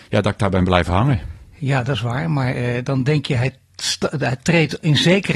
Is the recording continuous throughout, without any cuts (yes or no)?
yes